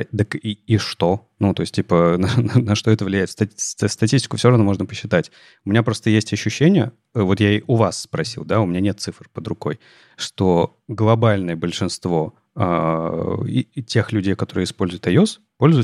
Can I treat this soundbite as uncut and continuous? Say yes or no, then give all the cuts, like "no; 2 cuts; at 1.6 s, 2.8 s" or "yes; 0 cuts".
yes; 0 cuts